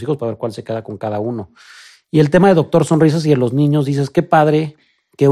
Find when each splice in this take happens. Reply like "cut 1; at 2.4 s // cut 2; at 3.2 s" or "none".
none